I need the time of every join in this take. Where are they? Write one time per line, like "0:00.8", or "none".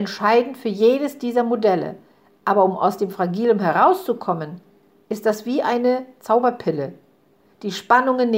none